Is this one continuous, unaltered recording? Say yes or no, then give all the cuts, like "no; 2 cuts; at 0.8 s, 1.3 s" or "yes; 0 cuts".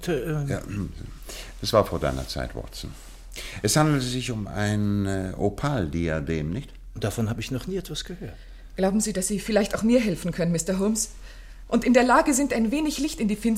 yes; 0 cuts